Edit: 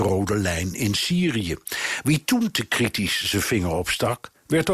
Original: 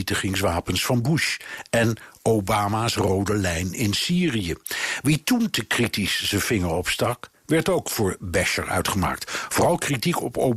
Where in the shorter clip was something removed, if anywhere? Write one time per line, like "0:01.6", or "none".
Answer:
none